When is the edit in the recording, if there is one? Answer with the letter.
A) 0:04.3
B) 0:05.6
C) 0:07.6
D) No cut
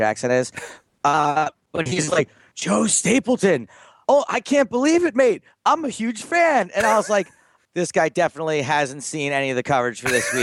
C